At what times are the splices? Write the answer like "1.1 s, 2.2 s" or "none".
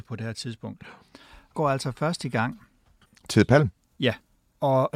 1.5 s, 3.1 s